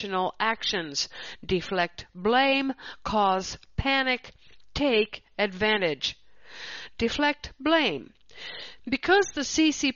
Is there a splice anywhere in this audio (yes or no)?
no